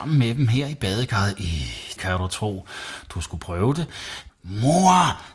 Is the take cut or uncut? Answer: cut